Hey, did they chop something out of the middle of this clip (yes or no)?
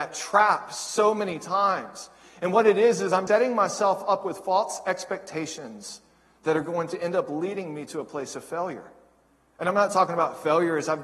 yes